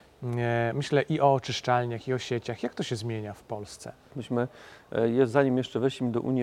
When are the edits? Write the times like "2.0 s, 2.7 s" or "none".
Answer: 4.1 s